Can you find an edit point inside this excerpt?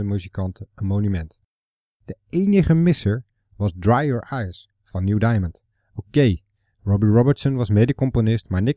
no; 0 cuts

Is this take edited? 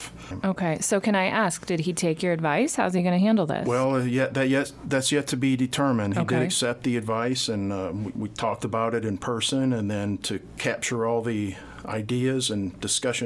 no; 0 cuts

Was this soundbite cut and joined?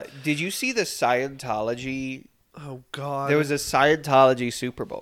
no; 0 cuts

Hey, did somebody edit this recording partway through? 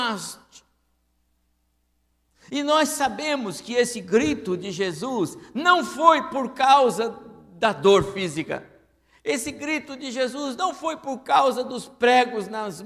no; 0 cuts

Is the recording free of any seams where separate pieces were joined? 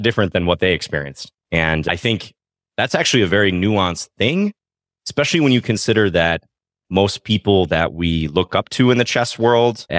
no; 1 cut; at 1.4 s

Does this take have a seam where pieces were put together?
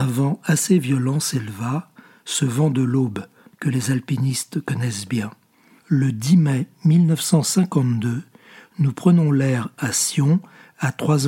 yes; 1 cut; at 5.8 s

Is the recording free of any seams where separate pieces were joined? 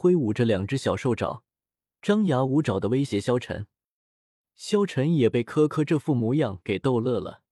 yes; 0 cuts

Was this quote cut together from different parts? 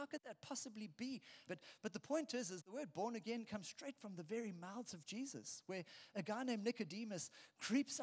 yes; 1 cut; at 1.5 s

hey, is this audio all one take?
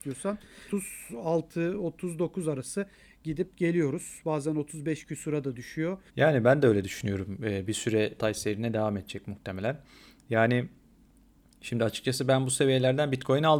no; 1 cut; at 6.1 s

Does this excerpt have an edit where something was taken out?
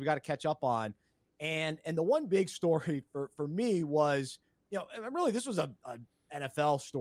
no; 0 cuts

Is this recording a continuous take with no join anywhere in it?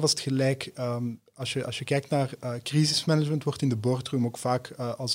yes; 0 cuts

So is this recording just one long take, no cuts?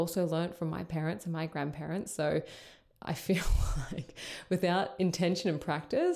yes; 0 cuts

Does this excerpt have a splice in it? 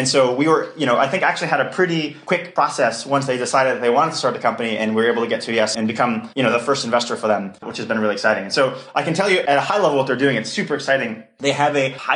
no; 0 cuts

